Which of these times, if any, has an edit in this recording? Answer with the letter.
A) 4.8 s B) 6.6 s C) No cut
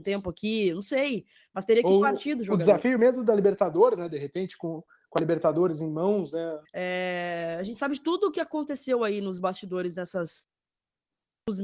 B